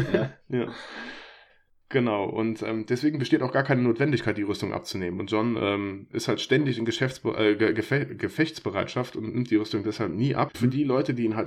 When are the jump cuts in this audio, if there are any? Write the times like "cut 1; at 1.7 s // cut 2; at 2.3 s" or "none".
cut 1; at 10.5 s